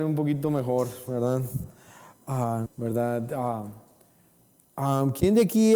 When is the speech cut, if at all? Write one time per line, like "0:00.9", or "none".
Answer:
0:02.7